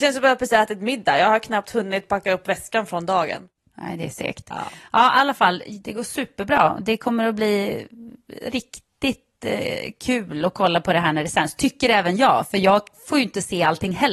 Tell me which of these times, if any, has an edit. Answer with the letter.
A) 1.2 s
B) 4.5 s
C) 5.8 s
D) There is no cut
C